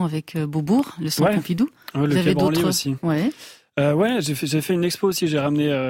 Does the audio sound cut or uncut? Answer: uncut